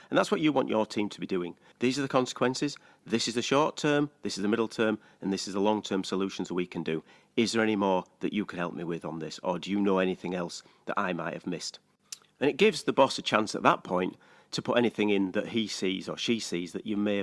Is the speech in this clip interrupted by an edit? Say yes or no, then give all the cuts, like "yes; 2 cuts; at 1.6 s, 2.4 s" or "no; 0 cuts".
yes; 1 cut; at 1.7 s